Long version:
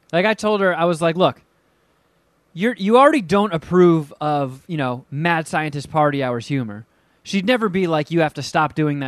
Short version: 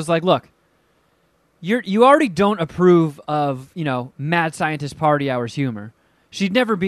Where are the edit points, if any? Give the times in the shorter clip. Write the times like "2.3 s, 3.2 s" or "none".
none